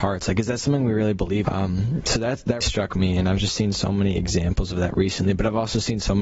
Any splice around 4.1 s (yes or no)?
no